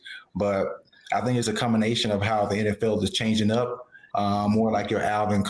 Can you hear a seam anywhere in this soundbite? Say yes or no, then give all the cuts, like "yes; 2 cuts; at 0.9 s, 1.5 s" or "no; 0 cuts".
yes; 2 cuts; at 1.4 s, 4.1 s